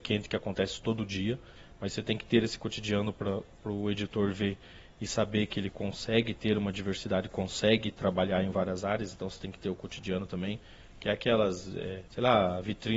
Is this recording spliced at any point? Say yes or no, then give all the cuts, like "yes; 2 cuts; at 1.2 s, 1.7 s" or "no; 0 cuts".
yes; 1 cut; at 12.1 s